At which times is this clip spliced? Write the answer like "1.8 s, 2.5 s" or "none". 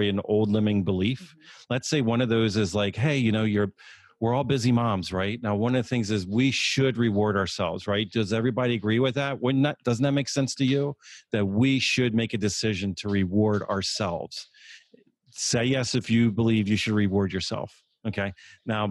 none